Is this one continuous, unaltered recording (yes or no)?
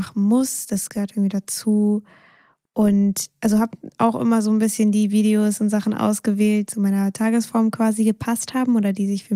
no